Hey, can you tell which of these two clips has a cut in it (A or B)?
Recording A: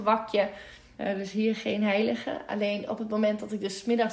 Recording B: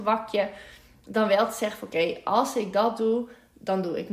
A